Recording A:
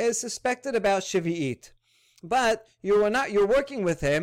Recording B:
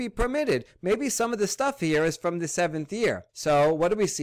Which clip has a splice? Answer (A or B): B